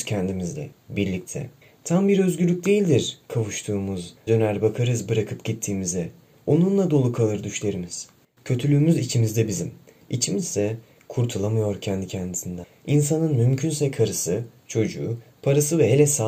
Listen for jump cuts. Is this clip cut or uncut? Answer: cut